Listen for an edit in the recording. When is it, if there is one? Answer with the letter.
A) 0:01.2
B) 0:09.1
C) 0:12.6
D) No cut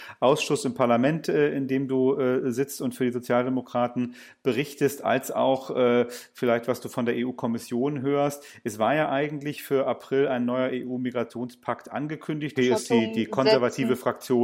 C